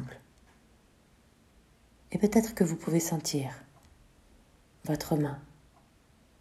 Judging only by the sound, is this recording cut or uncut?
cut